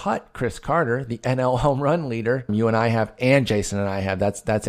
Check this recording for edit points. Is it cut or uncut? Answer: cut